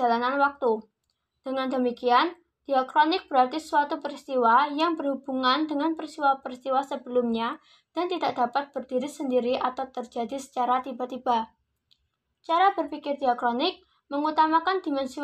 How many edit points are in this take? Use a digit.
0